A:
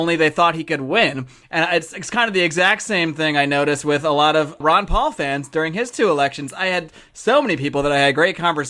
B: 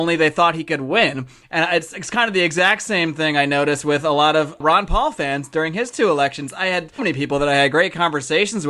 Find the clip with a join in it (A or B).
B